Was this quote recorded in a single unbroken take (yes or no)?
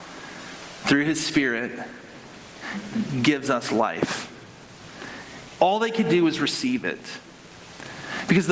no